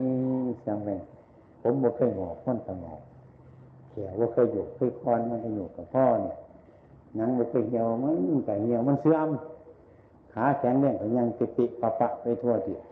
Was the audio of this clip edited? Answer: no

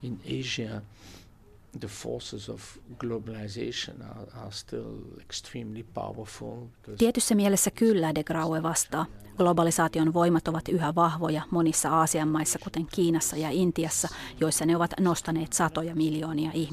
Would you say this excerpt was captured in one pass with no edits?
yes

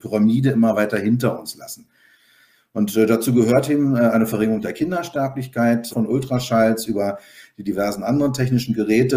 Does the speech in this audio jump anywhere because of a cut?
yes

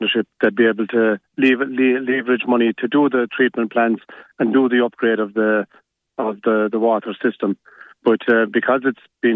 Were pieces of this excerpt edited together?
no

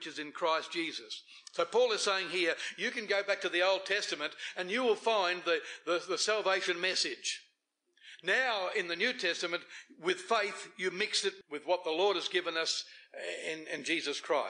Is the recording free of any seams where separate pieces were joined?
no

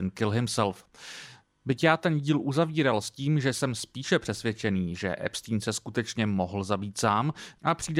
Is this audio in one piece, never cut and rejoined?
yes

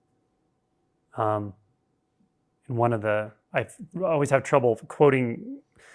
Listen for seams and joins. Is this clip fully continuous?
yes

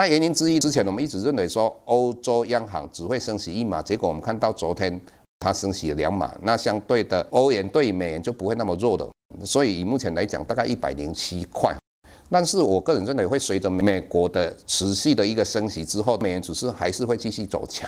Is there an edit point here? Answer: no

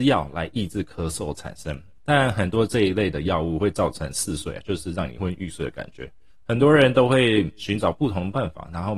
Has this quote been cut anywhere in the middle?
yes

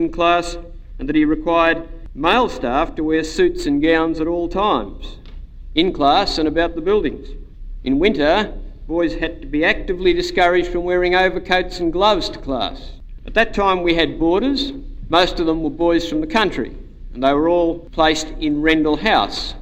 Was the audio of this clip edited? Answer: yes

